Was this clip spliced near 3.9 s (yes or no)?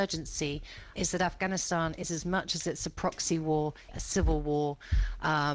yes